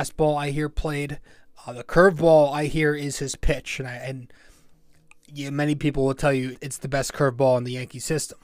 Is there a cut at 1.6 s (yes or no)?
no